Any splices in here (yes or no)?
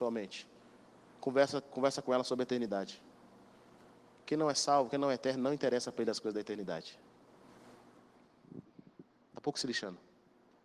no